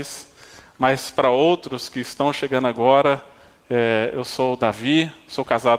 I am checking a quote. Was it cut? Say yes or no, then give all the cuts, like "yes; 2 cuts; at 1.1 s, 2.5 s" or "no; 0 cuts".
no; 0 cuts